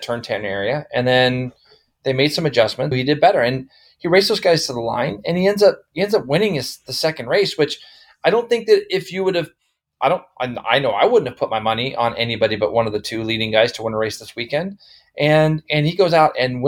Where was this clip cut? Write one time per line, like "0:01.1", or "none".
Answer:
0:02.9